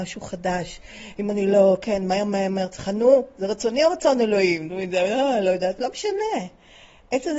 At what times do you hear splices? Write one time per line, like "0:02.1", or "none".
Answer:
none